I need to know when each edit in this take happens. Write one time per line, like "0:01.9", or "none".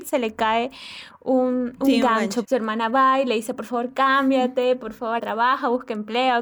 0:02.4
0:05.2